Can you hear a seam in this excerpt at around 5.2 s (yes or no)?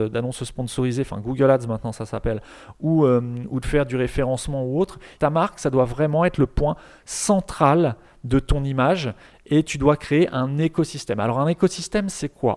yes